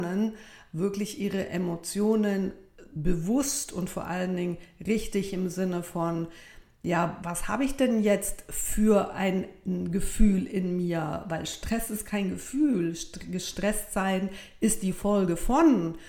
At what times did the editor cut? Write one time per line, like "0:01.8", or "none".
0:07.2